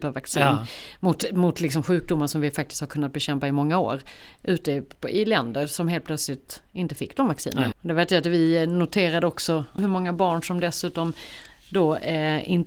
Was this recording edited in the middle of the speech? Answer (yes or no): yes